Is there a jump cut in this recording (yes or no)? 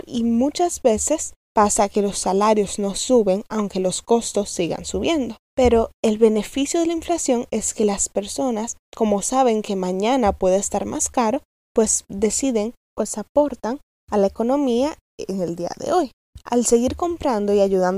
no